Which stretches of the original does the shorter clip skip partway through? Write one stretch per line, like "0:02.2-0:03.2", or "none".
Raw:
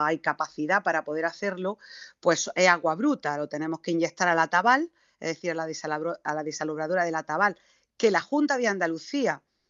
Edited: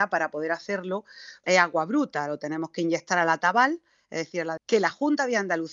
0:02.2-0:02.5
0:05.7-0:07.9